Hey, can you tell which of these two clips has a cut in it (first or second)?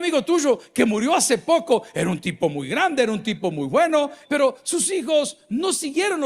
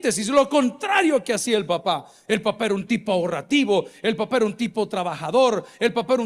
first